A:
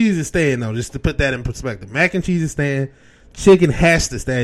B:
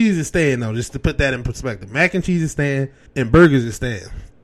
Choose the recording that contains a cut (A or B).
B